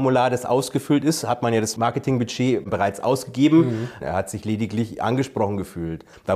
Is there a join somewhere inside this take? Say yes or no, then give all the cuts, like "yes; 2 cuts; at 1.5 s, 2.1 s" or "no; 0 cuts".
yes; 1 cut; at 4.0 s